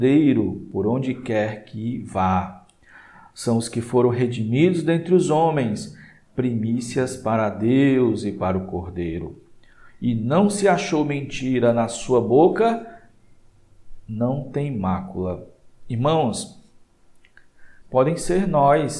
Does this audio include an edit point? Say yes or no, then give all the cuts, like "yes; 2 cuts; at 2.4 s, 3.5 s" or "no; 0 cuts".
yes; 1 cut; at 17.8 s